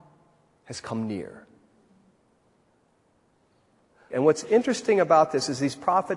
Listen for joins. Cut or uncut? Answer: cut